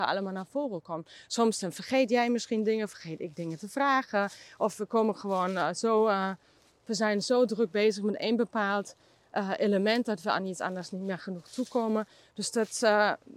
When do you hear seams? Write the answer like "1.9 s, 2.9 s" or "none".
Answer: none